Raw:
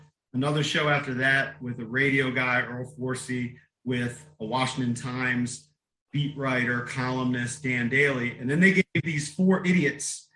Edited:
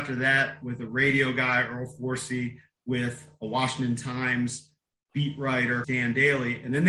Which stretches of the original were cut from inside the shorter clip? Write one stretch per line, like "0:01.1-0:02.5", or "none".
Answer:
0:06.8-0:07.6

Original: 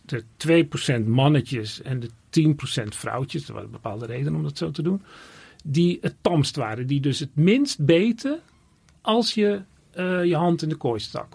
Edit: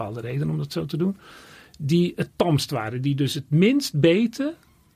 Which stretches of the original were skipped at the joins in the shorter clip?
none

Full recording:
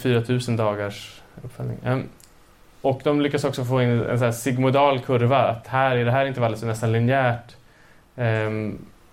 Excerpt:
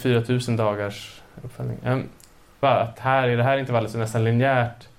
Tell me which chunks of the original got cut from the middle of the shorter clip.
0:02.6-0:05.3

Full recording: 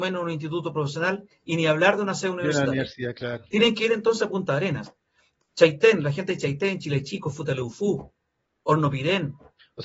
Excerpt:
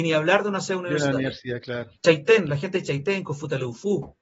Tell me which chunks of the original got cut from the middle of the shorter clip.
0:03.5-0:05.5
0:06.8-0:07.2

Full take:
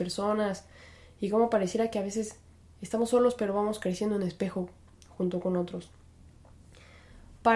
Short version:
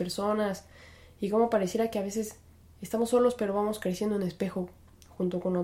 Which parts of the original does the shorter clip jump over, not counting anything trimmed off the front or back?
none

